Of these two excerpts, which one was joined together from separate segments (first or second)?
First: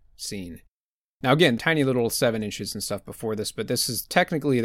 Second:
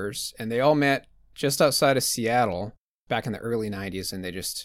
first